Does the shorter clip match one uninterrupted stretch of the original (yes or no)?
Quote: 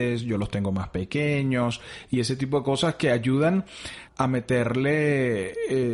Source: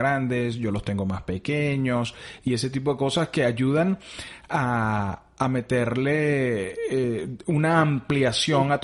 no